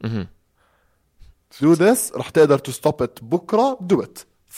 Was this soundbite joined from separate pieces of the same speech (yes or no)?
yes